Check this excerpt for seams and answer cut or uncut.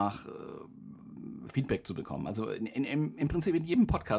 uncut